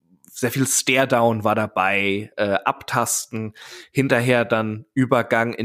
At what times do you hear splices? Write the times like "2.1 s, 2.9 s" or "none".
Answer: none